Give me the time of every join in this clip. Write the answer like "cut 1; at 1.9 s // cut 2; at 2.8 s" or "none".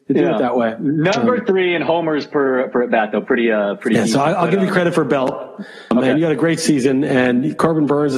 none